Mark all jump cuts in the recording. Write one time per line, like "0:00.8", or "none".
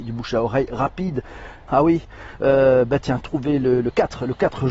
0:01.7